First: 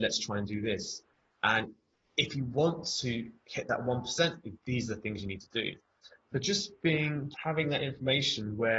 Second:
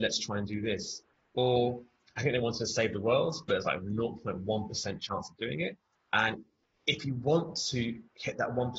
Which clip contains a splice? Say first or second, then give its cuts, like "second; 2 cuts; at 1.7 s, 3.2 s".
first; 2 cuts; at 1.3 s, 7.3 s